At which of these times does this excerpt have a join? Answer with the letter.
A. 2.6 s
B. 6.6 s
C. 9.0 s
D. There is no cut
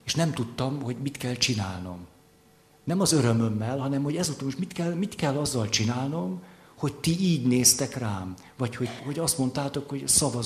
C